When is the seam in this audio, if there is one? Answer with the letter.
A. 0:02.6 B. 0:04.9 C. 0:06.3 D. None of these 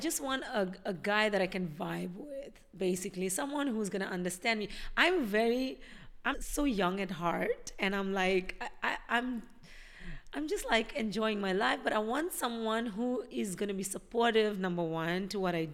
C